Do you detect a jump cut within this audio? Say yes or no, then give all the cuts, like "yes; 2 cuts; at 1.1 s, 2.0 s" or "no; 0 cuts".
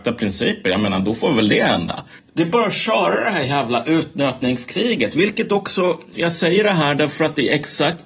yes; 1 cut; at 2.2 s